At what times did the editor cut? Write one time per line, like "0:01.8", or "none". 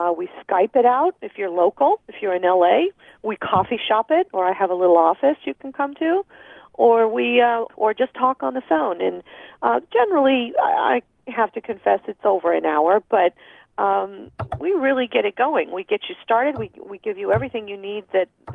0:07.7